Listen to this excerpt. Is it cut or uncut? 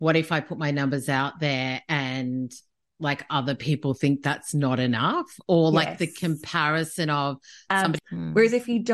cut